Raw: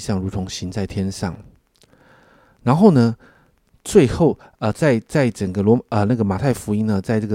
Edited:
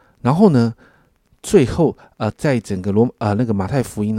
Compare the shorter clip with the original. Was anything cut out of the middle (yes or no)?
yes